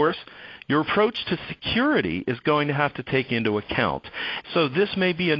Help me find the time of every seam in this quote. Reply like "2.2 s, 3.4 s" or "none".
4.4 s